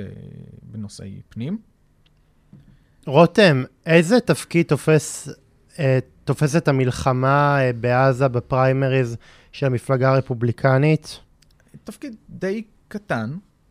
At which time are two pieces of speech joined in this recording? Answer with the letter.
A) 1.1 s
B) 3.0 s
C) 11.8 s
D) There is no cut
B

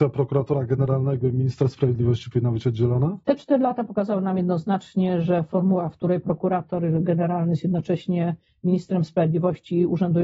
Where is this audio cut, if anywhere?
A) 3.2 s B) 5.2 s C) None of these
A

